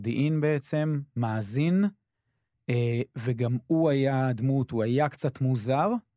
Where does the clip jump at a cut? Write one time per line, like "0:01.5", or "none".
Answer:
none